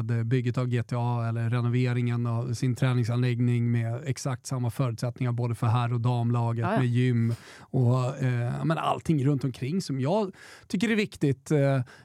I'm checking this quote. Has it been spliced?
no; 0 cuts

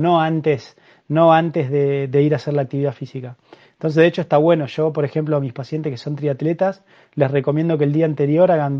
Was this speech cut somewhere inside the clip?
no; 0 cuts

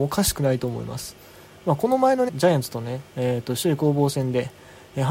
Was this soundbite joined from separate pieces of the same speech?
yes; 1 cut; at 2.3 s

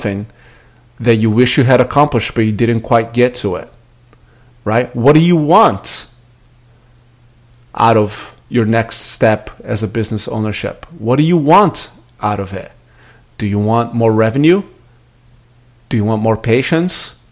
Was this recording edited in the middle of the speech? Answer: yes; 1 cut; at 8.4 s

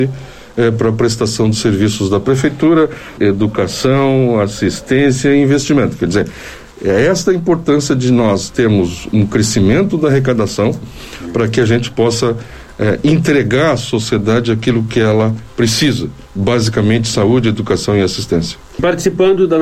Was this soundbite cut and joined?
yes; 1 cut; at 3.2 s

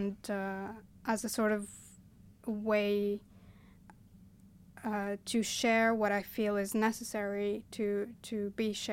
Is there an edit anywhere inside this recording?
no; 0 cuts

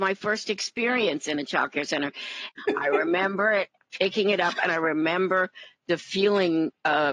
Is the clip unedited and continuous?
no; 1 cut; at 2.6 s

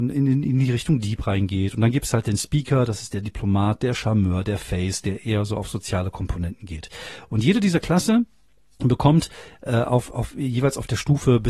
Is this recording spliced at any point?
no; 0 cuts

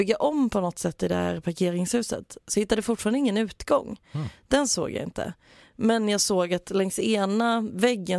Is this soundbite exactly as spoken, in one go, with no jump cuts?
yes; 0 cuts

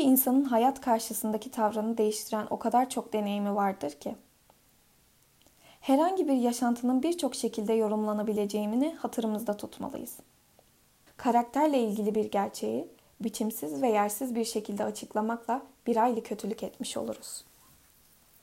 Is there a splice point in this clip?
yes; 1 cut; at 11.1 s

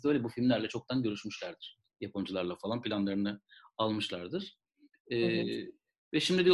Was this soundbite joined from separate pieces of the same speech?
no; 0 cuts

